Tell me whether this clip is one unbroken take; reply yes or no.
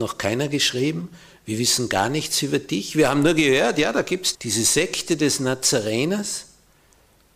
no